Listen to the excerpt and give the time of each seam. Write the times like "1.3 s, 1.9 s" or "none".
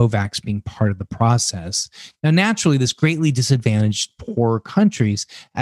none